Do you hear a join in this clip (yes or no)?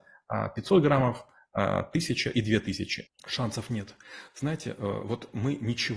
yes